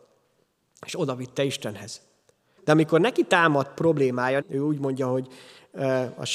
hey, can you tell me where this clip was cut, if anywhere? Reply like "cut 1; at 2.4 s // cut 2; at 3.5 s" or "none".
cut 1; at 2.6 s // cut 2; at 4.4 s